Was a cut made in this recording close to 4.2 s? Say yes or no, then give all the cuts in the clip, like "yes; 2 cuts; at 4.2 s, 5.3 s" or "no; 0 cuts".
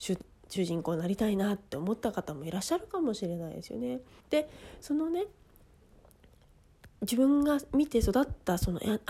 yes; 2 cuts; at 4.2 s, 7.0 s